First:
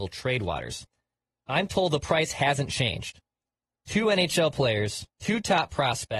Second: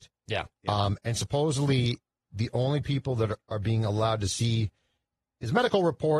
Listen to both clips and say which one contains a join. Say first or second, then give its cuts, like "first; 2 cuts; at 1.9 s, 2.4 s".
first; 1 cut; at 5.1 s